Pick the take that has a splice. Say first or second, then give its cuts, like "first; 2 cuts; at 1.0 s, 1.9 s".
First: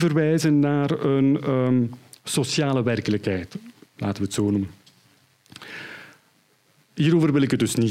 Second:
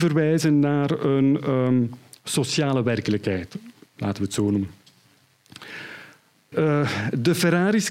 second; 1 cut; at 6.5 s